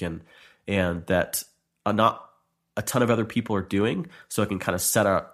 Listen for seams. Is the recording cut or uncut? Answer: uncut